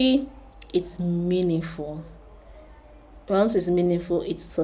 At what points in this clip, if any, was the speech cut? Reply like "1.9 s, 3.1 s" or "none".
3.2 s